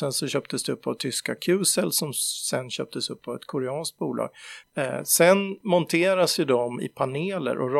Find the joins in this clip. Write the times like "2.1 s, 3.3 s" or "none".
4.6 s